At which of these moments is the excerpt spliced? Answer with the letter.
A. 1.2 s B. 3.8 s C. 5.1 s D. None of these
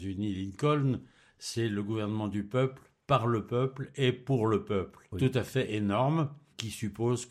C